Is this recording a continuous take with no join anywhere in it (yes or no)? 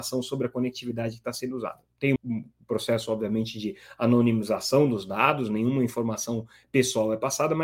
no